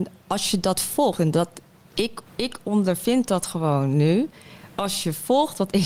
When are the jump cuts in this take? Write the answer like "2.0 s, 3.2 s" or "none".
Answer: 2.3 s